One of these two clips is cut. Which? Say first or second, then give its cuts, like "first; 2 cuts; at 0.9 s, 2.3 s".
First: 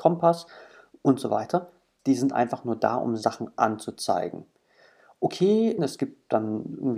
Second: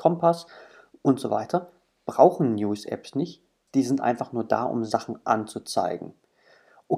first; 2 cuts; at 2.0 s, 5.8 s